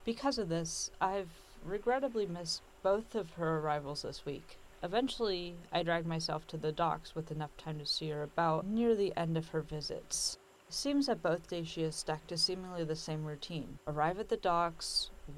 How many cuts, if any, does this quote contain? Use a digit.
2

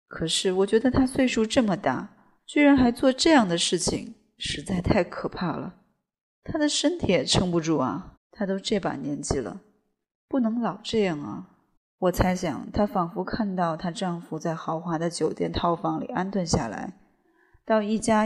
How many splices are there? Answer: 3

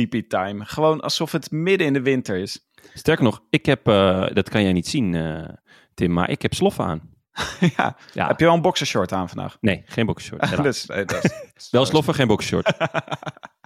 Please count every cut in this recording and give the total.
0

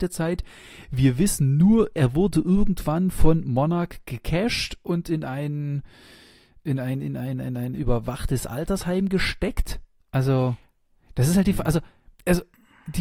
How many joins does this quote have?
1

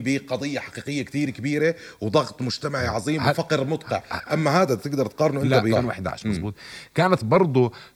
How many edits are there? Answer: 1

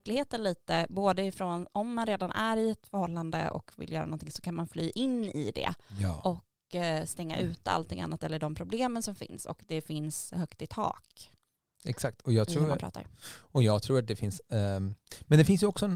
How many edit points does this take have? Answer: 0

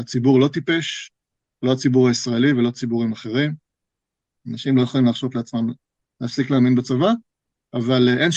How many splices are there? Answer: 1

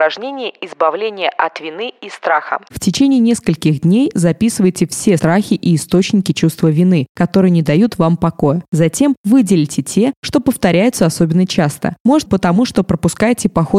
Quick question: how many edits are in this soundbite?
2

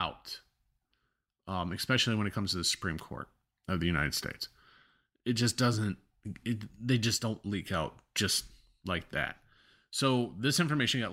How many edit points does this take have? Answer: 1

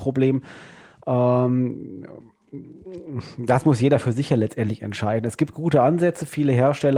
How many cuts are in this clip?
0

